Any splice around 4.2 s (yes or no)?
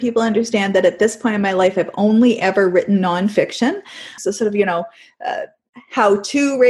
yes